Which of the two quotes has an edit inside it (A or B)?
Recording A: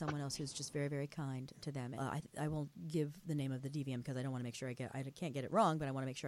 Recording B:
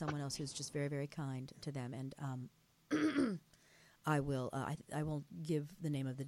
A